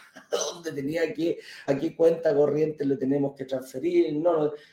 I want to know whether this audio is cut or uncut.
cut